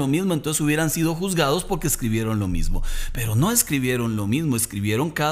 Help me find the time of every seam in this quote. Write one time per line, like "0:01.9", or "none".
none